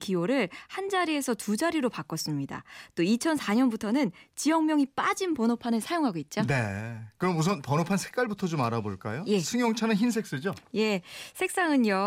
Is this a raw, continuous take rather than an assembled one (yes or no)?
yes